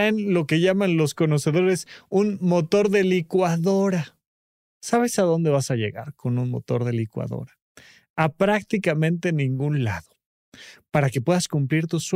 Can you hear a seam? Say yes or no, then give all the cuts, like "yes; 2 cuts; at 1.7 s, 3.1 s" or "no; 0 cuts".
no; 0 cuts